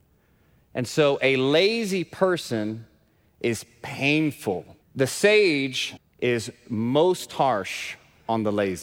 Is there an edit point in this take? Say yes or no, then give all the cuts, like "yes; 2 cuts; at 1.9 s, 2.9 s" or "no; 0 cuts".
yes; 2 cuts; at 4.8 s, 6.0 s